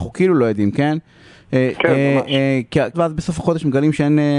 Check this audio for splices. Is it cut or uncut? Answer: cut